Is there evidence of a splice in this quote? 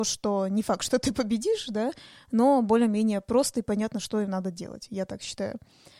no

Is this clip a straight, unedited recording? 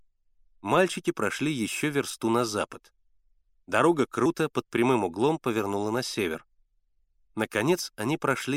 yes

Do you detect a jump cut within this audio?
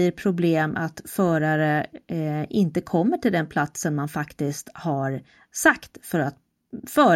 no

